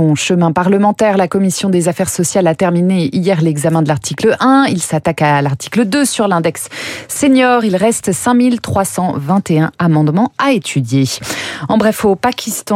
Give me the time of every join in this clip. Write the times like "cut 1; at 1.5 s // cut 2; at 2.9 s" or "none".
none